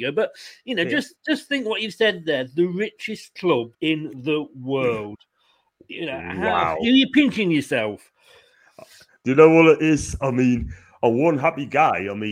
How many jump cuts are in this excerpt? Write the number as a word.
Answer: one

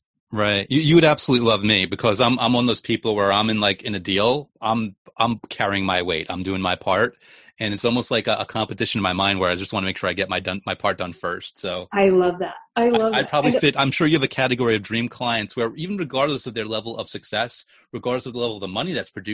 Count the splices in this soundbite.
zero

